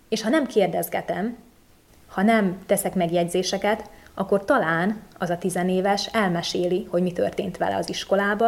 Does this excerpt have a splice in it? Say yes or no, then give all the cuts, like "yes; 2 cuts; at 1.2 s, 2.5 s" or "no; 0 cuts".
no; 0 cuts